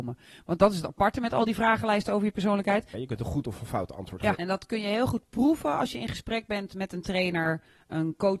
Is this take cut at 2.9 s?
yes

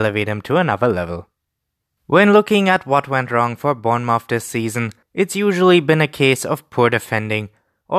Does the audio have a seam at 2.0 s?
yes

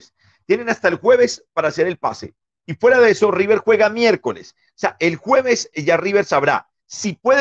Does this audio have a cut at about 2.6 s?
yes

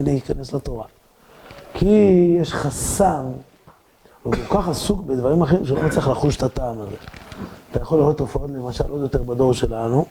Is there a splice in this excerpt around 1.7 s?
no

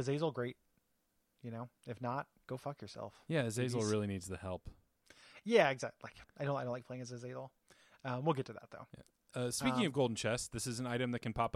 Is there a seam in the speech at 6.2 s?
yes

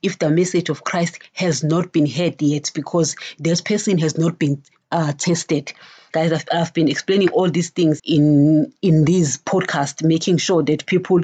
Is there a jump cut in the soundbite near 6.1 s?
yes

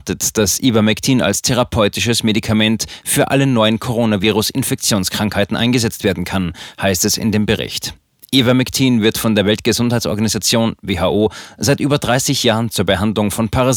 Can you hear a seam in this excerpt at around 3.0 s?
yes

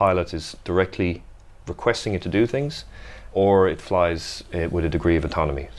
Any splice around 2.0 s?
no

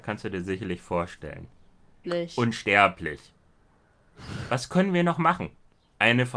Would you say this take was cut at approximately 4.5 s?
no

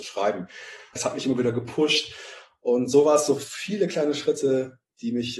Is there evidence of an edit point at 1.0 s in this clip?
yes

